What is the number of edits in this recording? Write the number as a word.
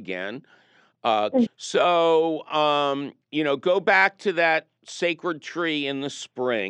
two